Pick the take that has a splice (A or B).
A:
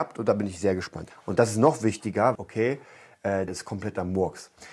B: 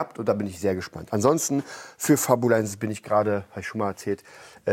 A